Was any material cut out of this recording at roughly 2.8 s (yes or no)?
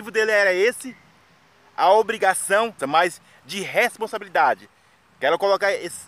yes